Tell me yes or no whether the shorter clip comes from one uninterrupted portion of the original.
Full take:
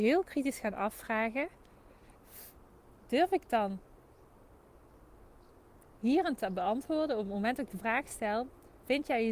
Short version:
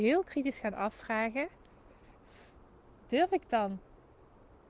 yes